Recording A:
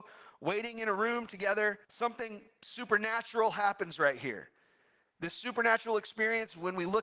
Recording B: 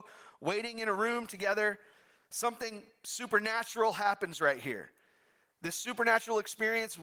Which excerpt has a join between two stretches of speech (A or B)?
A